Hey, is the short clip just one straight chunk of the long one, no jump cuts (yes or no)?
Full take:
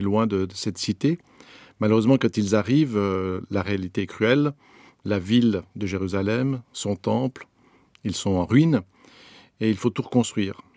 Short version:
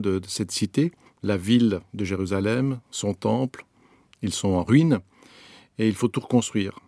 no